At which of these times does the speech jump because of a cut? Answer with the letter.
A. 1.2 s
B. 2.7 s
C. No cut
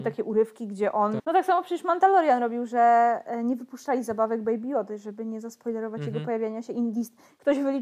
A